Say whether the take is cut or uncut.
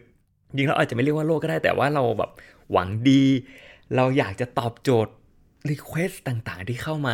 uncut